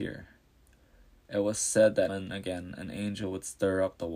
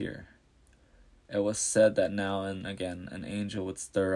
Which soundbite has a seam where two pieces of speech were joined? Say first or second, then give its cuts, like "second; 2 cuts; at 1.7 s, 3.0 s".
first; 1 cut; at 2.1 s